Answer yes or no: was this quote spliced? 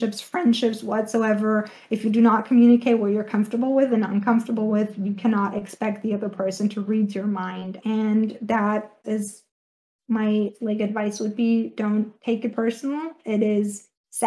yes